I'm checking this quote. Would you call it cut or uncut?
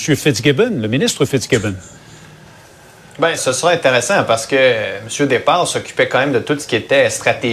cut